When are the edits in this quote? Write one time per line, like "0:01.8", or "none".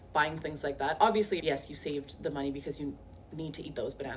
0:01.4